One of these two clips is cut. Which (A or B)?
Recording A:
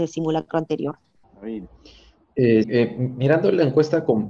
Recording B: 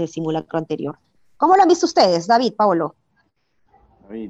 A